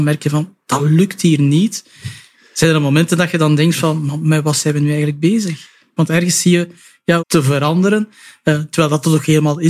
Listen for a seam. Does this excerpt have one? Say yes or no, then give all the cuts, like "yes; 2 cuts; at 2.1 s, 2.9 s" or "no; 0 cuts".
yes; 2 cuts; at 6.0 s, 7.2 s